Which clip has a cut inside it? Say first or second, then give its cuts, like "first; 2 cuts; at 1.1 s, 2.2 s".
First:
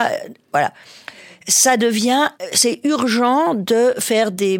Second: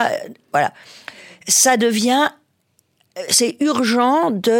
first; 1 cut; at 2.3 s